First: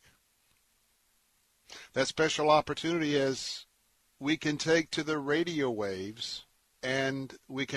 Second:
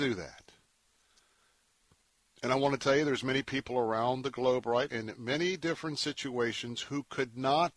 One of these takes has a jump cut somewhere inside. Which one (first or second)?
second